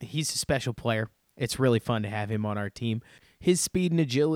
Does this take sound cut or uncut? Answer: uncut